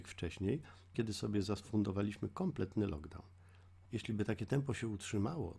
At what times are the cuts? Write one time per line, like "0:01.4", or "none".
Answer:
0:00.9
0:03.9

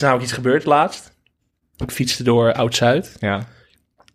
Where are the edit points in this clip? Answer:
none

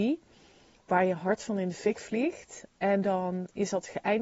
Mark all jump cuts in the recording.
none

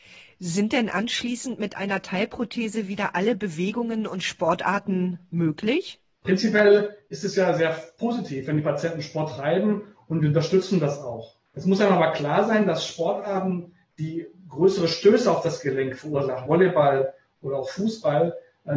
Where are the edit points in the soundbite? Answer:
0:16.5

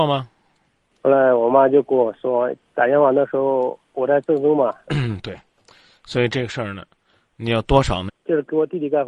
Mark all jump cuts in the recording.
0:00.9
0:04.9
0:08.1

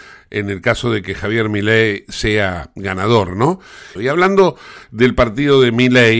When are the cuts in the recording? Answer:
0:04.0

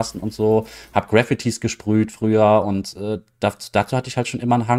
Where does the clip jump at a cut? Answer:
none

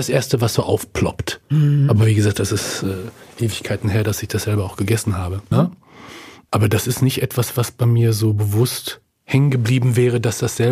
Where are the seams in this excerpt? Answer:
0:05.5

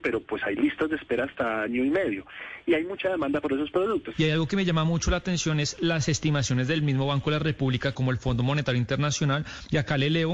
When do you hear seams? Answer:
0:04.1
0:07.9

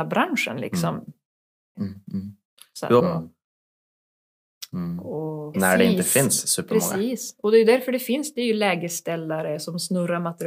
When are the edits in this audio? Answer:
0:01.7
0:03.0
0:05.5

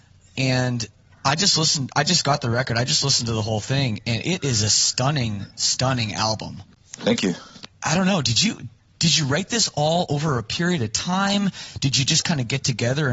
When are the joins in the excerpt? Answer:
none

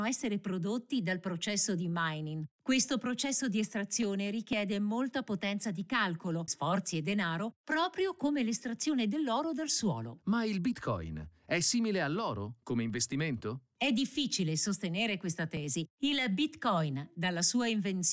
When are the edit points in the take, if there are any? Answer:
0:06.5

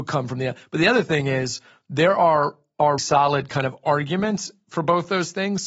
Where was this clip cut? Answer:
0:03.0

